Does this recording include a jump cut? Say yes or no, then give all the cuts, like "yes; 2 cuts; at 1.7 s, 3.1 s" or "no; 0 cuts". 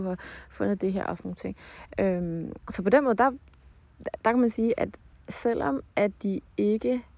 no; 0 cuts